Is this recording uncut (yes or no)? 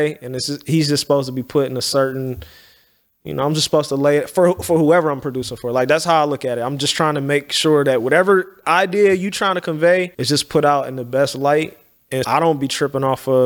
no